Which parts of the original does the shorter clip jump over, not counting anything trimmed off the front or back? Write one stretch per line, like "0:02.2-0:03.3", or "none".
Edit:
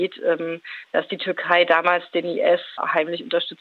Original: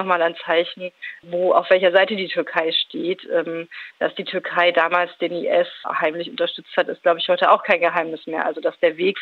none